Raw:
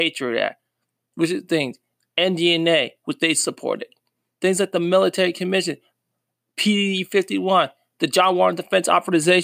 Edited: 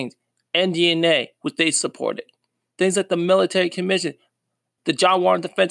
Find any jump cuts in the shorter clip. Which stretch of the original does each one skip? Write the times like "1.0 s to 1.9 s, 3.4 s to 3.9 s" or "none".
6.4 s to 7.9 s